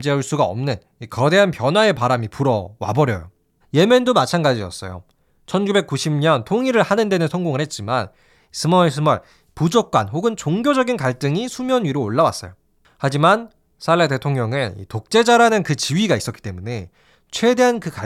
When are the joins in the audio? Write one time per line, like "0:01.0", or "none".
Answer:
0:03.6